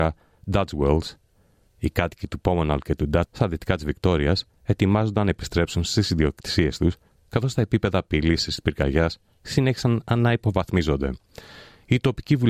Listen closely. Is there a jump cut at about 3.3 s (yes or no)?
yes